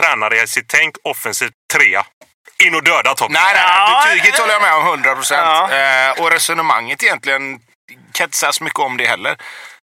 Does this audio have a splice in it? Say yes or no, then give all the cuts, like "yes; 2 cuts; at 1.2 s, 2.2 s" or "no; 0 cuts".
yes; 2 cuts; at 1.5 s, 6.1 s